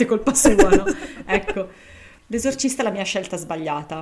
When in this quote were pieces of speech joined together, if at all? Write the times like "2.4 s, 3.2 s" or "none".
2.2 s